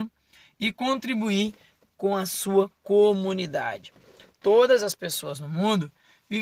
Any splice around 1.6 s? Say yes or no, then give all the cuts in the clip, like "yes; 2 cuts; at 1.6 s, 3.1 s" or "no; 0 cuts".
no; 0 cuts